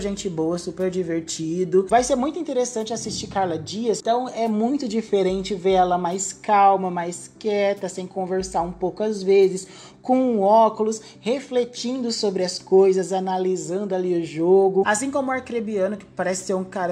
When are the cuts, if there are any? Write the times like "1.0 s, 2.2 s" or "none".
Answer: 1.9 s, 14.8 s

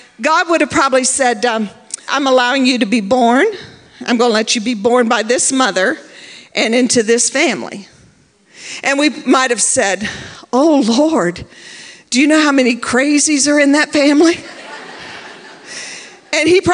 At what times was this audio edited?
2.1 s

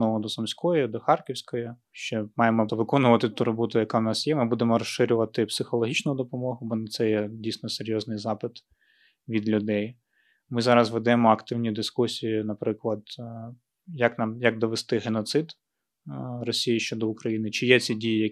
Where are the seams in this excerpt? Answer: 2.7 s

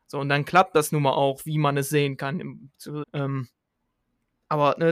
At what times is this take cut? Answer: 3.0 s

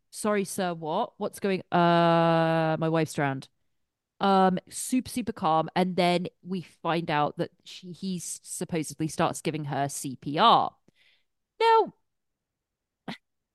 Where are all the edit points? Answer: none

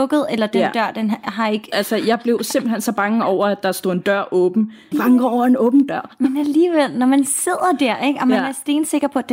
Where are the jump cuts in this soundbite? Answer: 1.7 s, 4.9 s

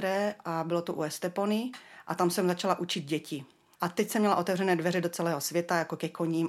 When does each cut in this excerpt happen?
3.7 s

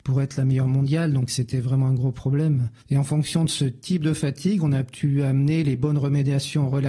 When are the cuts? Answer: 2.8 s

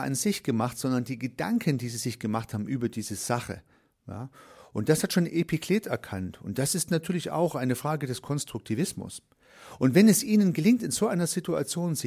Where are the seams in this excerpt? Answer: none

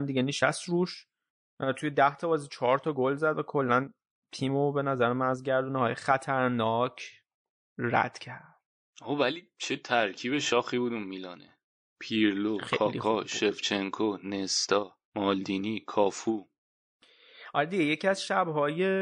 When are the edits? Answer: 15.0 s

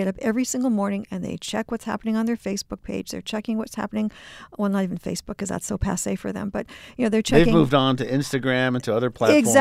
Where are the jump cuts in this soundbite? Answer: none

